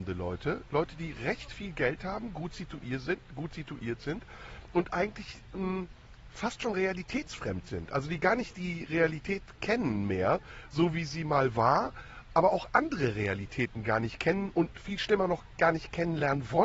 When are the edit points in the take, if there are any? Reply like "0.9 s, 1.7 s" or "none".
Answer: none